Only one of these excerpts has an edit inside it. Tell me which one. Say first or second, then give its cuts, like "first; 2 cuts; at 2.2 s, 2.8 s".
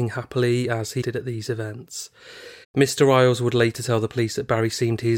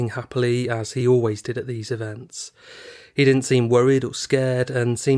first; 2 cuts; at 1.0 s, 2.6 s